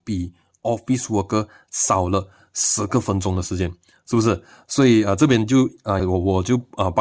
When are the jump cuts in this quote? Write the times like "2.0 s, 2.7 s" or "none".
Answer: 6.0 s